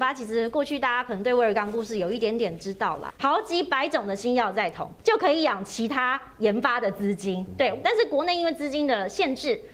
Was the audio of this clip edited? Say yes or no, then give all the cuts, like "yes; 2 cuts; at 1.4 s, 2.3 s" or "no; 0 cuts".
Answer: yes; 3 cuts; at 3.1 s, 5.0 s, 7.8 s